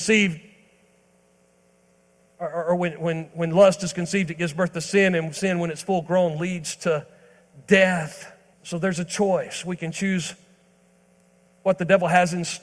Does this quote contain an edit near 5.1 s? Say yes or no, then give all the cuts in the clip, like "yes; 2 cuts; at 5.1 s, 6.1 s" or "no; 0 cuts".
no; 1 cut; at 8.5 s